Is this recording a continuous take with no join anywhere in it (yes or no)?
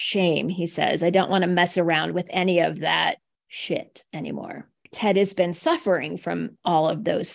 no